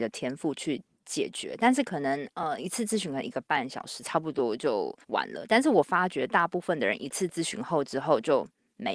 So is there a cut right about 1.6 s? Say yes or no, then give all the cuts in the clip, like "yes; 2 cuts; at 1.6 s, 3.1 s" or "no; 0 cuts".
no; 1 cut; at 5.0 s